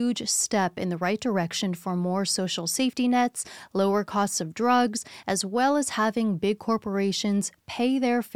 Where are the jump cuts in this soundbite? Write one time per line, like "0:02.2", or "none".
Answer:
0:05.2